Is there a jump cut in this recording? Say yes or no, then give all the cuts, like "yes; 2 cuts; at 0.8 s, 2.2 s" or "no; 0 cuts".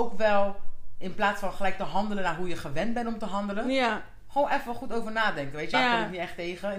yes; 1 cut; at 5.7 s